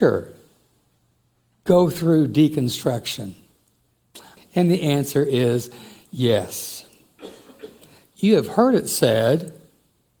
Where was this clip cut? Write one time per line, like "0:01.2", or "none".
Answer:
0:04.4
0:08.1